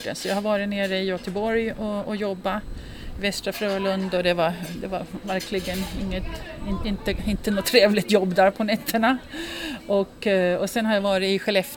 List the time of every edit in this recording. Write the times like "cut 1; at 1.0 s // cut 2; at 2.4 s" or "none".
none